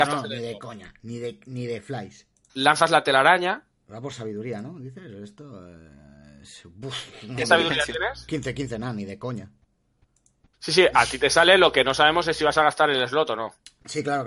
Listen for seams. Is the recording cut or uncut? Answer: cut